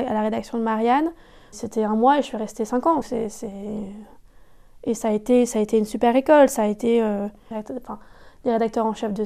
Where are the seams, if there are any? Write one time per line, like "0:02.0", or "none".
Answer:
0:03.0
0:07.5